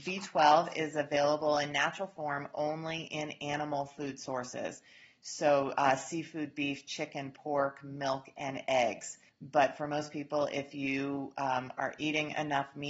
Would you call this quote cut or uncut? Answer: cut